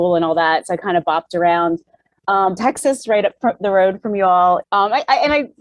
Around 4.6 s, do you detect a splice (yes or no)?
yes